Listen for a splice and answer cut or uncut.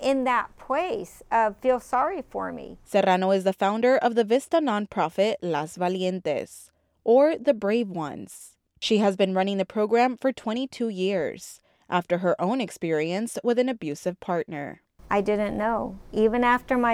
cut